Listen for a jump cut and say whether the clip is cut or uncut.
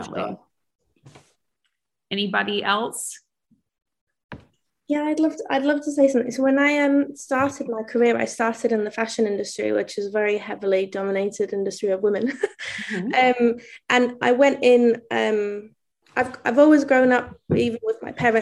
uncut